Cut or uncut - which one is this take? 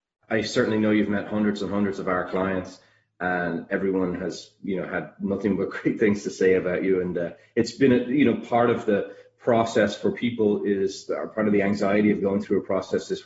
uncut